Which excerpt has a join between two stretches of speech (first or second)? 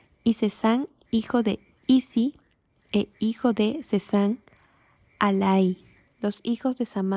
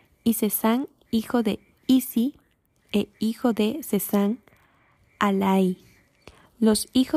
first